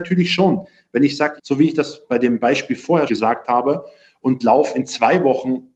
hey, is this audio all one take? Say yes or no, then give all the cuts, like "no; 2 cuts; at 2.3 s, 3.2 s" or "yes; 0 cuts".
no; 2 cuts; at 1.4 s, 3.1 s